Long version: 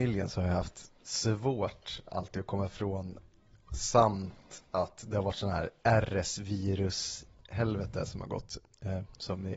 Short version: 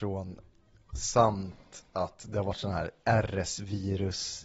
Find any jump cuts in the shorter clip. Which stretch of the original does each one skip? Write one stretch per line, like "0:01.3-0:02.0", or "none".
none